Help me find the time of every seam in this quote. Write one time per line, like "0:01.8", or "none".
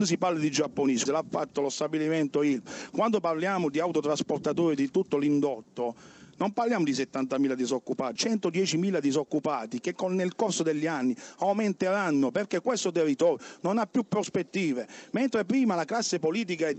0:01.1
0:08.2